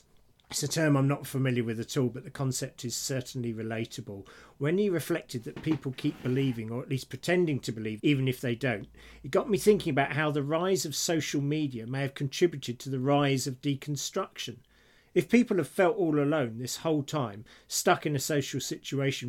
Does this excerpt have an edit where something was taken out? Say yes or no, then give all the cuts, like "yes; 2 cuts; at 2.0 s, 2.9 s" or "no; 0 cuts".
yes; 1 cut; at 8.0 s